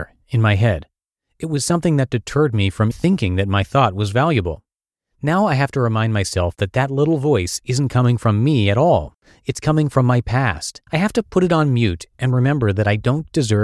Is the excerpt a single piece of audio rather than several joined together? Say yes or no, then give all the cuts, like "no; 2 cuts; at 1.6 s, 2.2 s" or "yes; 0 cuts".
no; 2 cuts; at 2.9 s, 10.9 s